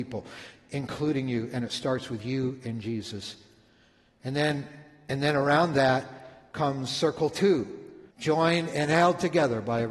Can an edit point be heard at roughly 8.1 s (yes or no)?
yes